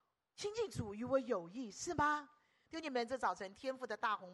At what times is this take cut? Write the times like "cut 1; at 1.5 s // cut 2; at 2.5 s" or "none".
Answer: cut 1; at 2.7 s